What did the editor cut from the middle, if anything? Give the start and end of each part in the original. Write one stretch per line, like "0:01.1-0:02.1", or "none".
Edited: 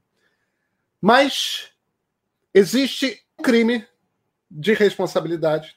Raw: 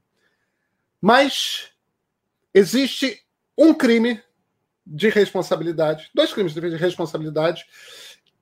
0:03.4-0:03.7